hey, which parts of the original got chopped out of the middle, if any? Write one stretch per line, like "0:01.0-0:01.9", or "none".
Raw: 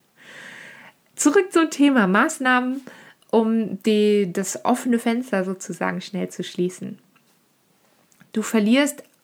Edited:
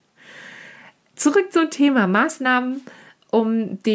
none